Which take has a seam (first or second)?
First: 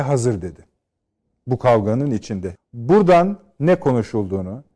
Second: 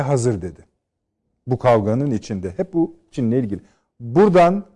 first